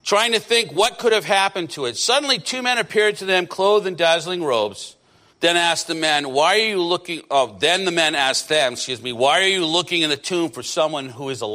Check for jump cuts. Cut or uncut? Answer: cut